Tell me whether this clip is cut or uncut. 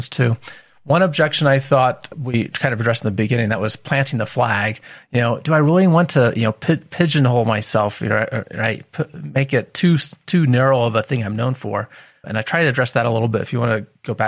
uncut